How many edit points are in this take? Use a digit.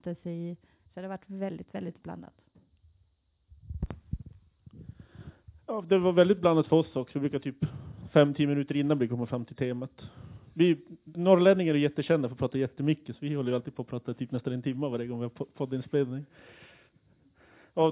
1